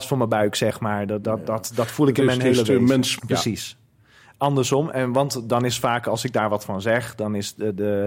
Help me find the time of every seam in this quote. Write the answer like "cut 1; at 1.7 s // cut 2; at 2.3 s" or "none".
cut 1; at 1.2 s // cut 2; at 3.2 s